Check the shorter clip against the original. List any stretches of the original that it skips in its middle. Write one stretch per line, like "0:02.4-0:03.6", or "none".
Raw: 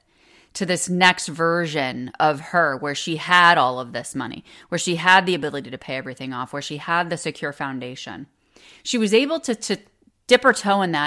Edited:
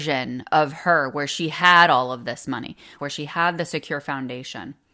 0:04.7-0:06.5